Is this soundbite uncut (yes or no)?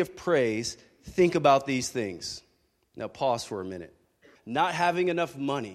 no